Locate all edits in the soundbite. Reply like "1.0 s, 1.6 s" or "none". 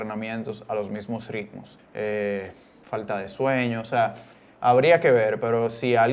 1.8 s